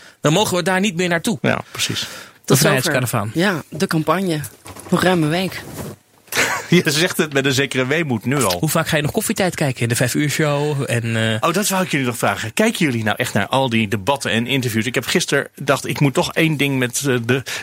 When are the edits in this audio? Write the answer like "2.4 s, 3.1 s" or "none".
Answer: 1.4 s